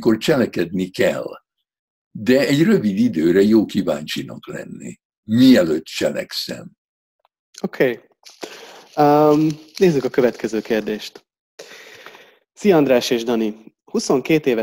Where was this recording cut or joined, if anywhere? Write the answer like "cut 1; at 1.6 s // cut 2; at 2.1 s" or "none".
none